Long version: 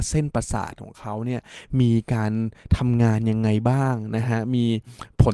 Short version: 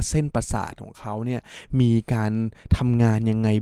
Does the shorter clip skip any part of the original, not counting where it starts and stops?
no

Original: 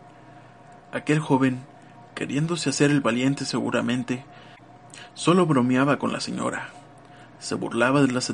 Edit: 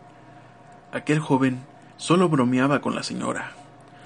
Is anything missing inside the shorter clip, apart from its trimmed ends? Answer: yes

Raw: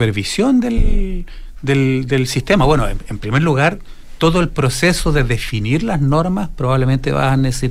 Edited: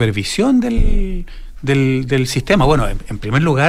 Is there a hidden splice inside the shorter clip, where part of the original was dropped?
no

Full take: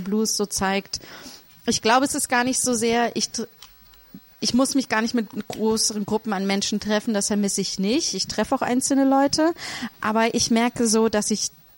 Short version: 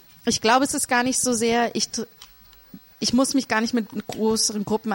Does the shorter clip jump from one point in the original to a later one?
no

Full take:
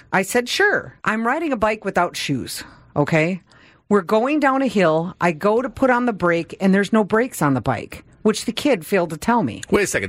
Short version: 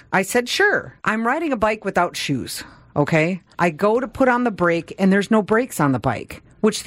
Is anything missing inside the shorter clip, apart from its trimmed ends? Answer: yes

